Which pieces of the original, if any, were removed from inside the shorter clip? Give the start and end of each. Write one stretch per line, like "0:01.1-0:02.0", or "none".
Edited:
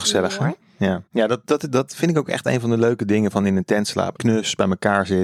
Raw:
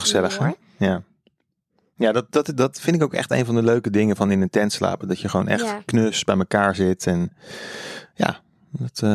0:01.1-0:01.9
0:05.0-0:05.8

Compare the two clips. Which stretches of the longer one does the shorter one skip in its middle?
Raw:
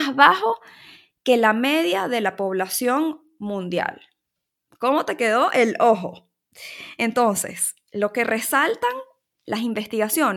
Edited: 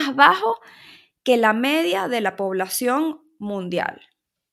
none

